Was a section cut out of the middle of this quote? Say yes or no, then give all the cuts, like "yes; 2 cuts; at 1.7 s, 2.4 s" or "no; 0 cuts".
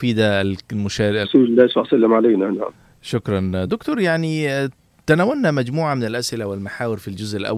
yes; 2 cuts; at 1.2 s, 3.7 s